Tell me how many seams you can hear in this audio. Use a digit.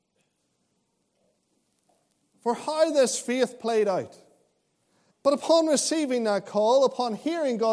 1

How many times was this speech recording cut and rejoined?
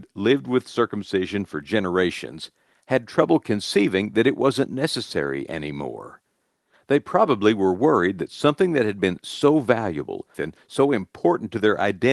1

